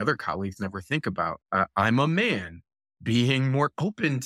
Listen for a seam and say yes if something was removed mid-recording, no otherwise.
yes